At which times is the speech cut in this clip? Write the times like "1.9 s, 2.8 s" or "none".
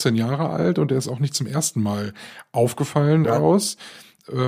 3.2 s

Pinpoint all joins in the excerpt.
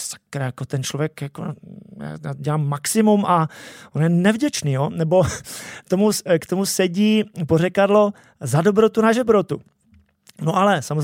none

